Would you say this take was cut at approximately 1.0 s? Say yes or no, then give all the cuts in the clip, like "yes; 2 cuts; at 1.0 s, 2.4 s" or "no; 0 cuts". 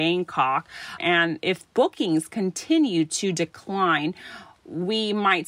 yes; 1 cut; at 1.0 s